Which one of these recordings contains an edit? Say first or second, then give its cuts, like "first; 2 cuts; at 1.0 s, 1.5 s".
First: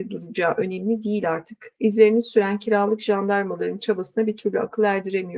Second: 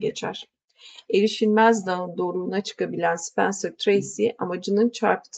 first; 1 cut; at 1.8 s